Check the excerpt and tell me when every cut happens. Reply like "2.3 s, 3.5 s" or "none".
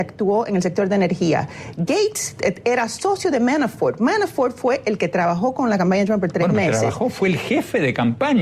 none